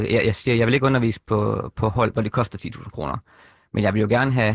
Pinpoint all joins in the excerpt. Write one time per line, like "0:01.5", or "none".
none